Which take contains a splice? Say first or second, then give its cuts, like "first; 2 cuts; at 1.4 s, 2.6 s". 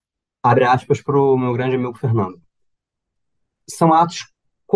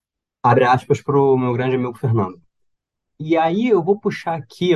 second; 1 cut; at 3.1 s